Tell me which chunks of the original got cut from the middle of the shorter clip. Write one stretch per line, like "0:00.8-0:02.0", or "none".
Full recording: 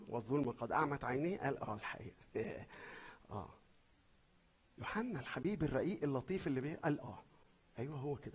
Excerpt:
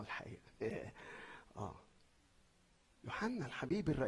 none